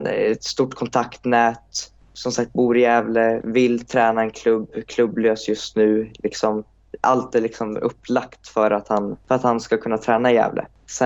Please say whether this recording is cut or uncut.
uncut